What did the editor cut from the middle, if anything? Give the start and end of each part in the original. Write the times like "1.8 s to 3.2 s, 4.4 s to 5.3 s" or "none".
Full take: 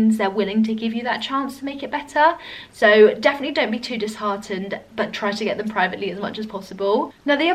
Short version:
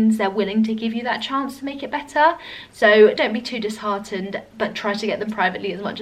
3.2 s to 3.5 s